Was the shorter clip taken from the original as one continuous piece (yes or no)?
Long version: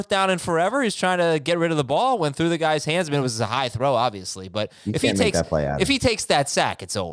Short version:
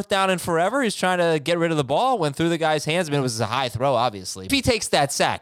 no